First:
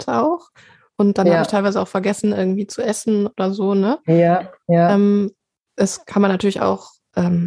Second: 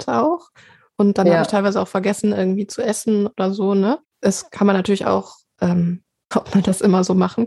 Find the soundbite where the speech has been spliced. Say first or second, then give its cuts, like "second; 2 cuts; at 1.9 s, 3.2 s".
second; 2 cuts; at 4.0 s, 6.3 s